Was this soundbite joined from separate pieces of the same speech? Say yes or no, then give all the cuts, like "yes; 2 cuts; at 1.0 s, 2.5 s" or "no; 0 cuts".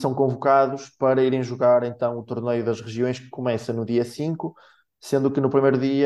no; 0 cuts